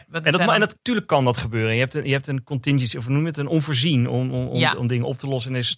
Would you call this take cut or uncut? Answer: uncut